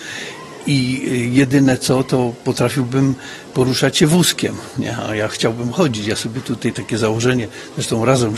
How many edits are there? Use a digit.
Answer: 0